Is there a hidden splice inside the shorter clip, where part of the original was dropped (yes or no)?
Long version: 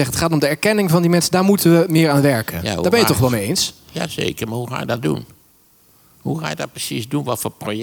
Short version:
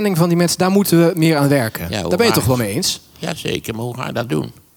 no